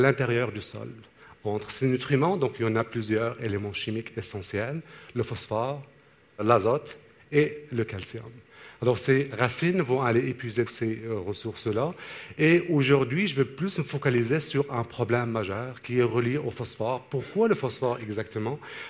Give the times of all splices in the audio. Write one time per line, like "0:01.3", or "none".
0:10.7